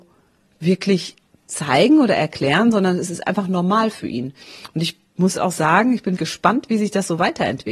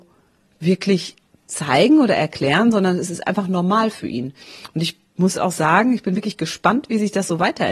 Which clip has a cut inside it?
first; 1 cut; at 6.2 s

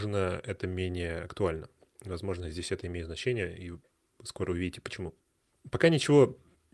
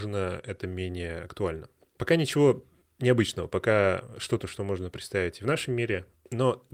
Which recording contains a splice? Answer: second; 1 cut; at 2.0 s

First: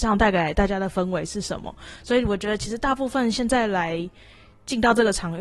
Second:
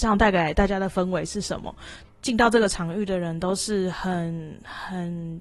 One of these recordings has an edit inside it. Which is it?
second; 1 cut; at 2.0 s

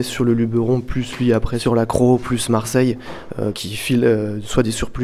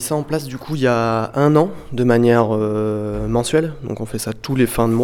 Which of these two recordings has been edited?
first; 1 cut; at 3.5 s

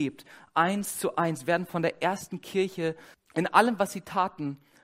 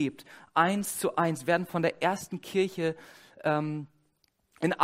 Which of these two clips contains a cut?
first; 1 cut; at 3.1 s

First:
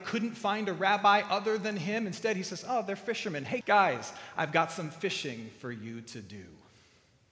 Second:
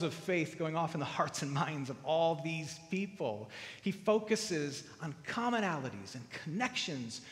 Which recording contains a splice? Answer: first; 1 cut; at 3.6 s

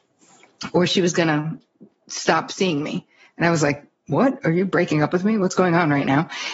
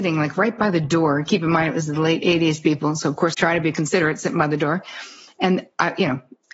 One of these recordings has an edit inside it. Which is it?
second; 1 cut; at 3.3 s

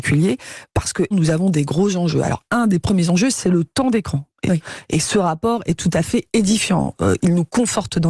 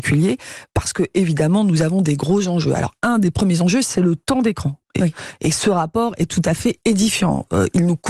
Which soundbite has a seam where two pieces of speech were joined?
first; 1 cut; at 1.1 s

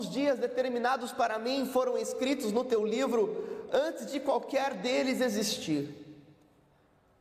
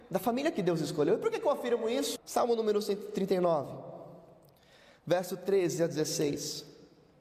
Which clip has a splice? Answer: second; 1 cut; at 2.2 s

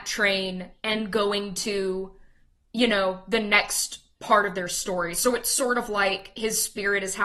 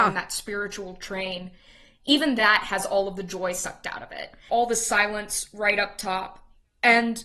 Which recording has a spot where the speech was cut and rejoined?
second; 1 cut; at 4.5 s

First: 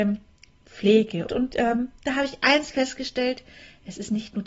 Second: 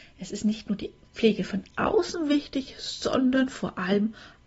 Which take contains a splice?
first; 1 cut; at 1.3 s

